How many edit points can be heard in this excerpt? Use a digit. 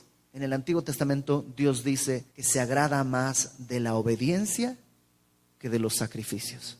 1